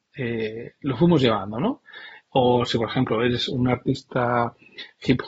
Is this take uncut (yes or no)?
no